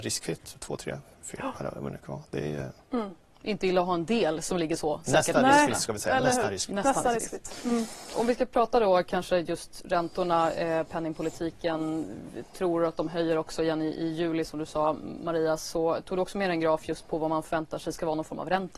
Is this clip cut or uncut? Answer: uncut